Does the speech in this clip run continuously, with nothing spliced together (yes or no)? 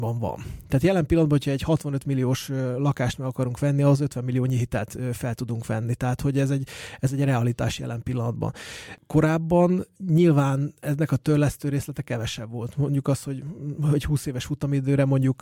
yes